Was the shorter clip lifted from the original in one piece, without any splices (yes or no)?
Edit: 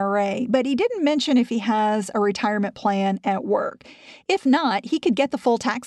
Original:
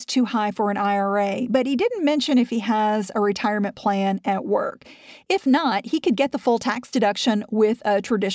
yes